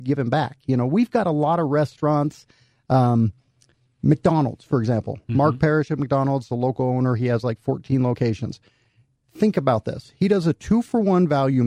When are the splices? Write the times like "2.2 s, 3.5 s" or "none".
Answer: none

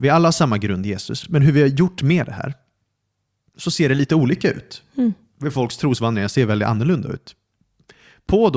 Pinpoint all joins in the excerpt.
none

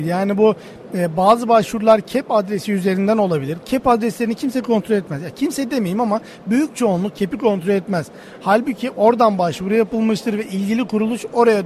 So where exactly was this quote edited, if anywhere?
3.6 s

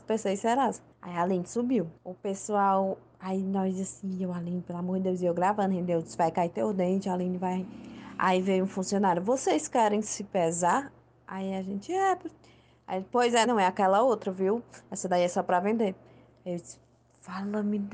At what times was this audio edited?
2.0 s, 13.4 s

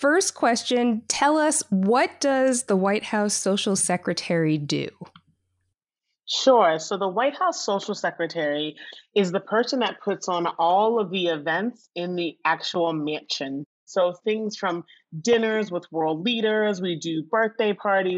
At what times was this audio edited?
none

